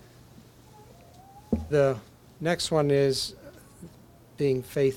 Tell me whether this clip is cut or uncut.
uncut